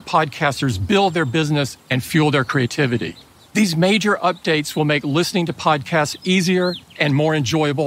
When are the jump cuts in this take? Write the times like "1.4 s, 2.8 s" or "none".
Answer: 3.5 s